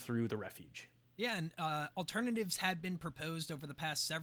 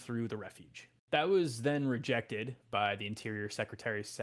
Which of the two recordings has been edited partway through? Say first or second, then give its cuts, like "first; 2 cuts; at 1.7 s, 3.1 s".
second; 1 cut; at 1.0 s